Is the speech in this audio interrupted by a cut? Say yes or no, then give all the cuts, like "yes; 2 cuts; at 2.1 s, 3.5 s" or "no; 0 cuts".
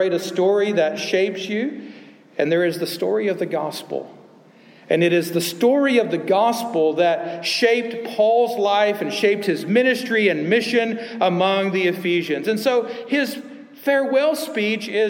no; 0 cuts